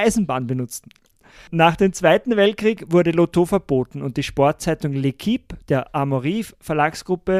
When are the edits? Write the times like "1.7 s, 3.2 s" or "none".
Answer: none